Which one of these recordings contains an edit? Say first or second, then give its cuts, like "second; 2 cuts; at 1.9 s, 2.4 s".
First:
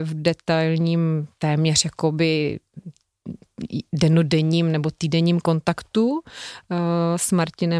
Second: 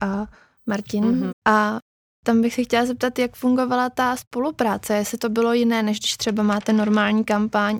second; 1 cut; at 1.3 s